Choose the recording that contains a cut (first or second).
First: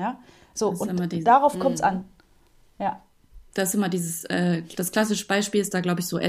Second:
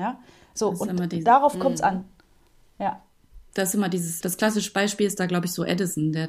second